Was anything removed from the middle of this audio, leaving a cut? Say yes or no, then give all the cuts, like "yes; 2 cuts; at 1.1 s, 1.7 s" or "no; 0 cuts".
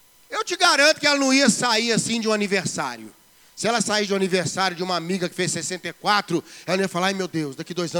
no; 0 cuts